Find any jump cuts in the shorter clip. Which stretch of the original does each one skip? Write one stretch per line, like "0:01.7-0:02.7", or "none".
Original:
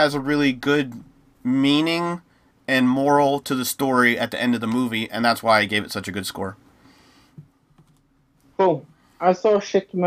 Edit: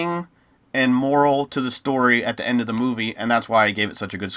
none